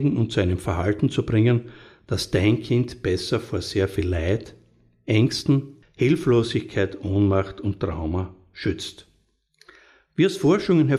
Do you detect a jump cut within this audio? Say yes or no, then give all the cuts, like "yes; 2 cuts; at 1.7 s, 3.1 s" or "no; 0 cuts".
yes; 1 cut; at 5.8 s